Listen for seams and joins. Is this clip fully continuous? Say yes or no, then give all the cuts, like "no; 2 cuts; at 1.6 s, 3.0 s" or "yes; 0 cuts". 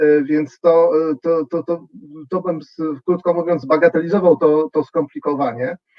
yes; 0 cuts